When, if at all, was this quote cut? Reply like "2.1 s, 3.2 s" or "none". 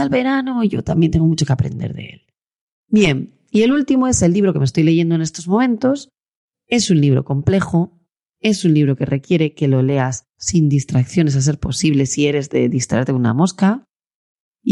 none